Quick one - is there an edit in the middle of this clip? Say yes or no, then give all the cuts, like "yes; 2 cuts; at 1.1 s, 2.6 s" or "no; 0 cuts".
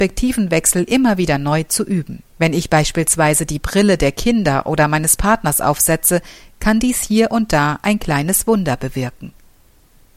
yes; 1 cut; at 2.3 s